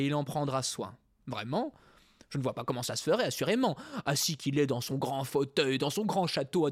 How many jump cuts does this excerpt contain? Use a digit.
0